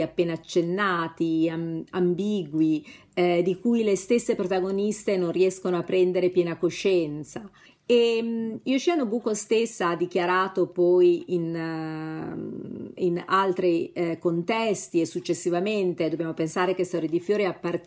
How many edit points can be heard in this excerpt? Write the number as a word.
one